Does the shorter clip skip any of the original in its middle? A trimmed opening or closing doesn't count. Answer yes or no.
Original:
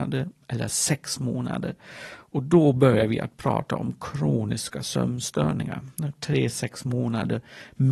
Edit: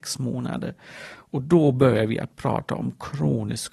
no